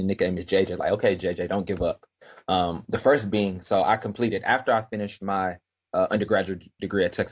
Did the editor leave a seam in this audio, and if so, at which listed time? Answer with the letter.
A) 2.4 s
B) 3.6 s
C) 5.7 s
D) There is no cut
D